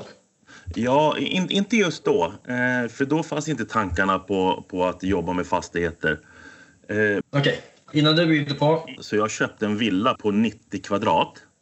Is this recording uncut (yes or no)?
no